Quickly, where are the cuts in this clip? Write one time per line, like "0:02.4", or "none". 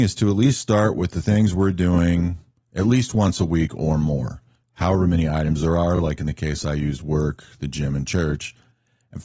none